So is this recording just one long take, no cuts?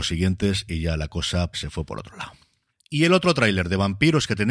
no; 1 cut; at 1.5 s

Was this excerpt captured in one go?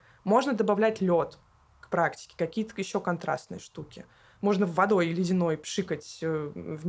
yes; 0 cuts

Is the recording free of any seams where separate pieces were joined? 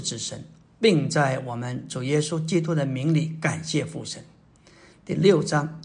yes; 0 cuts

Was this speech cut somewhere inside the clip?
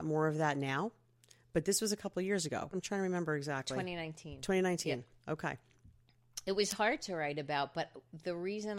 yes; 1 cut; at 2.7 s

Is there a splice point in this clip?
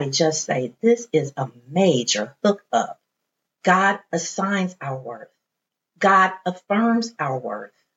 yes; 1 cut; at 3.5 s

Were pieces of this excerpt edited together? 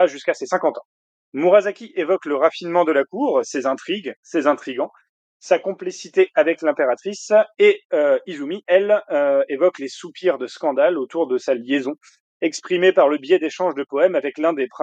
no; 0 cuts

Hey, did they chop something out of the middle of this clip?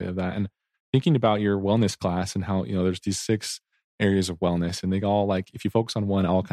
no; 0 cuts

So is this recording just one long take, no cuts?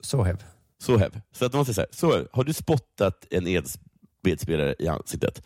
yes; 0 cuts

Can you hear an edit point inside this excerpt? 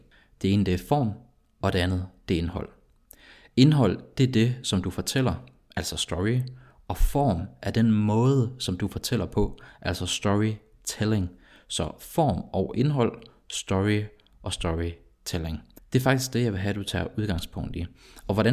no; 0 cuts

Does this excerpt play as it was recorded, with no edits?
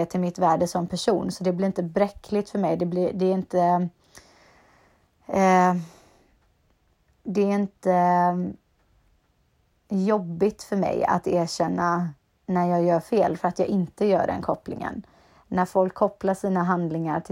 yes; 0 cuts

